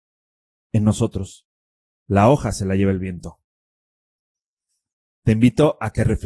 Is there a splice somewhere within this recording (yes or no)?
no